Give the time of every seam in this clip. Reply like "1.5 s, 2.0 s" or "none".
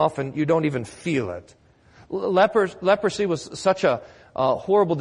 none